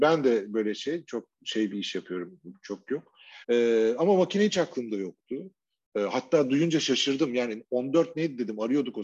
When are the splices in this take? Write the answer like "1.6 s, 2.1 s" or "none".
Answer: 3.4 s